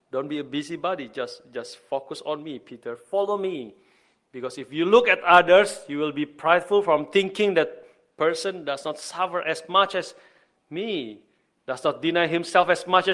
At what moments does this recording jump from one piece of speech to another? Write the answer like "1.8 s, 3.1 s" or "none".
none